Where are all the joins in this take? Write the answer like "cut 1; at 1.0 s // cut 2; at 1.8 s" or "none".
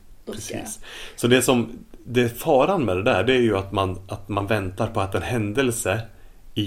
none